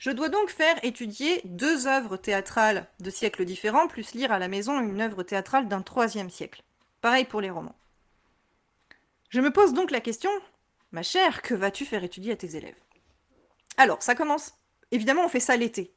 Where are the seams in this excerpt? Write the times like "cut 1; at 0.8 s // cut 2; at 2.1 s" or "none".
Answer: none